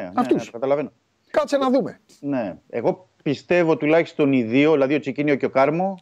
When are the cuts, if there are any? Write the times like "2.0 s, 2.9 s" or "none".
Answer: none